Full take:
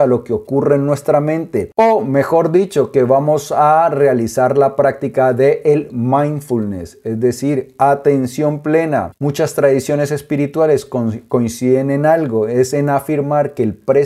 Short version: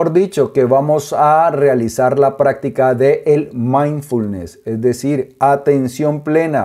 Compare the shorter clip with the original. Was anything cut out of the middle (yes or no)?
no